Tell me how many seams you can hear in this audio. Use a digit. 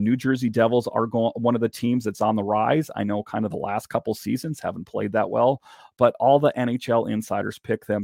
0